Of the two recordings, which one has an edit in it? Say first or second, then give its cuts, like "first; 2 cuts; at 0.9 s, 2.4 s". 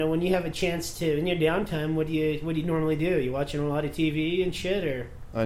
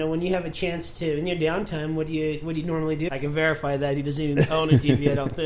second; 1 cut; at 3.1 s